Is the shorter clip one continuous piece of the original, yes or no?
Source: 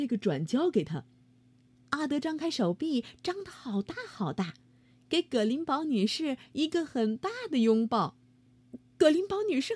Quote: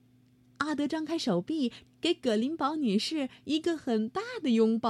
no